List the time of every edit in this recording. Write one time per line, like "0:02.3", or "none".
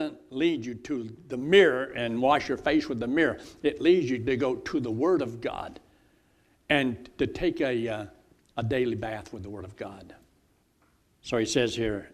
none